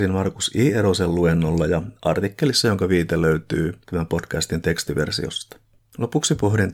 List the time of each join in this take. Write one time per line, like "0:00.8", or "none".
0:05.8